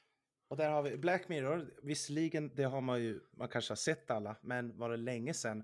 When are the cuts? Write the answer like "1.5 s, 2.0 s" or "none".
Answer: none